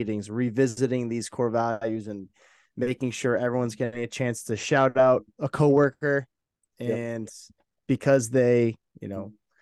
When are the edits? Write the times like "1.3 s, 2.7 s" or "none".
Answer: none